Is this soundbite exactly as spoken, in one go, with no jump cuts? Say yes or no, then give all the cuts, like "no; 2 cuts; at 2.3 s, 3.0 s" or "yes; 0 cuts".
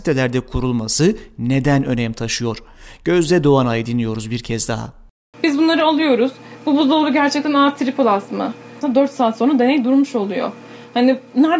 no; 2 cuts; at 5.3 s, 8.8 s